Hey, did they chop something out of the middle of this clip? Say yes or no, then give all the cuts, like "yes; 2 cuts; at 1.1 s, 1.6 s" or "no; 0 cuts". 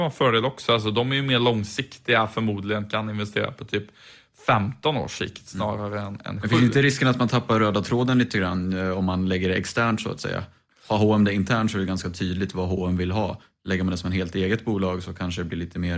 no; 0 cuts